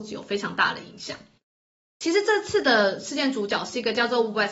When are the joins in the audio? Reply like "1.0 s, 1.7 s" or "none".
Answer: none